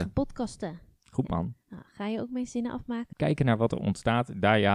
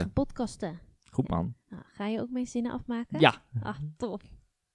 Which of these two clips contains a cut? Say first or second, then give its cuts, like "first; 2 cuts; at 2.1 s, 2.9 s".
first; 1 cut; at 3.1 s